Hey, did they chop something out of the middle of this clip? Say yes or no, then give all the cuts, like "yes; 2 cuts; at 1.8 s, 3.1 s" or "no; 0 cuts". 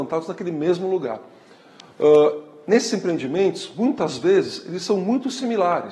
no; 0 cuts